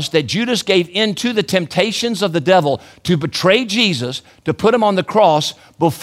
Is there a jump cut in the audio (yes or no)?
no